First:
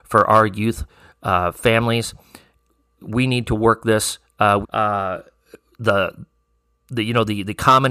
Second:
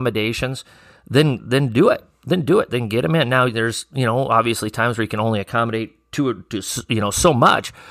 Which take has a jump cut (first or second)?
first